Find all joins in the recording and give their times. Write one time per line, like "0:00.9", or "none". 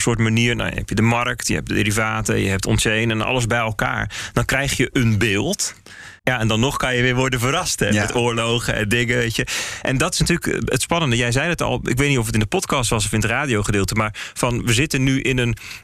0:06.2